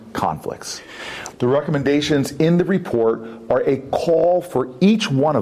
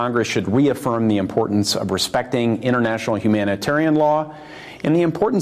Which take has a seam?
first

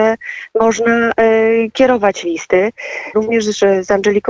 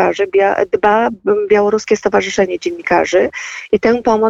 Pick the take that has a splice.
first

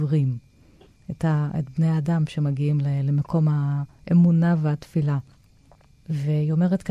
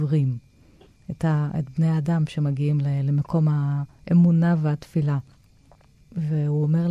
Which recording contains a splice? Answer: first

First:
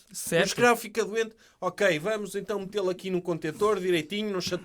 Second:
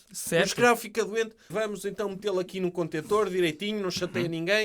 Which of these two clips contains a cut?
second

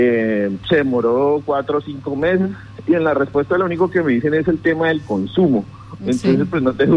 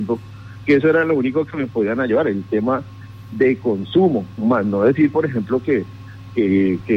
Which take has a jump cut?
first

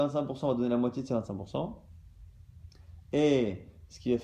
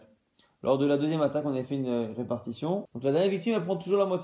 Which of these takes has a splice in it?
second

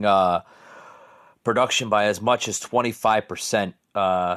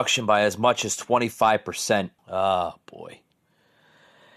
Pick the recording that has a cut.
second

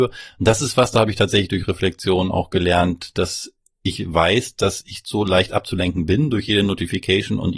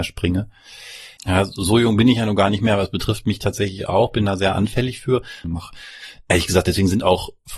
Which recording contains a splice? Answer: second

